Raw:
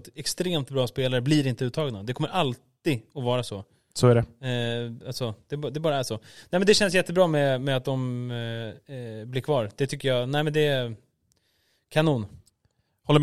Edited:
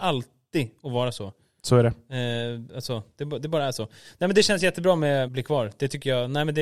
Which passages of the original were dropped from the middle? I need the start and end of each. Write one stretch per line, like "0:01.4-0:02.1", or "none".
0:07.6-0:09.3